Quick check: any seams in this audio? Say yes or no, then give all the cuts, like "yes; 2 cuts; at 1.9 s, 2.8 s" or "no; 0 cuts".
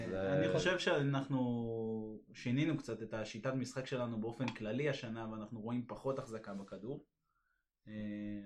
no; 0 cuts